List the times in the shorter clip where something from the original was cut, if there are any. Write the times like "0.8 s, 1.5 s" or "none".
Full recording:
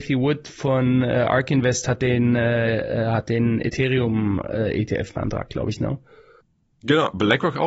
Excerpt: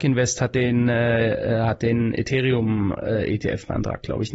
none